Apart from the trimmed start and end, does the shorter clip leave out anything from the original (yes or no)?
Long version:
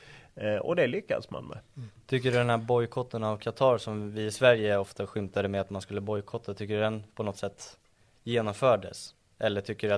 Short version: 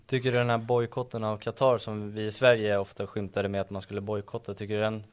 no